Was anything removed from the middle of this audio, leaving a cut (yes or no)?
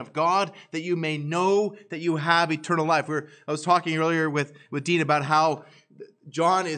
no